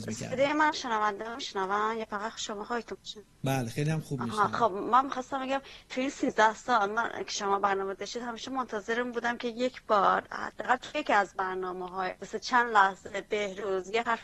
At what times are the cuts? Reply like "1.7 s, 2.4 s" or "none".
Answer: 3.3 s, 12.2 s